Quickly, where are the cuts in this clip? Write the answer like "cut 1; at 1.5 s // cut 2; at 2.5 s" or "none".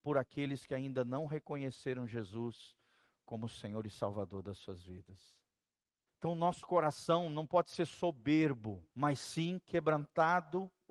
cut 1; at 6.1 s // cut 2; at 8.9 s